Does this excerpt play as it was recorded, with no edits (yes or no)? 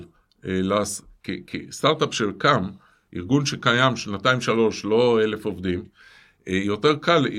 yes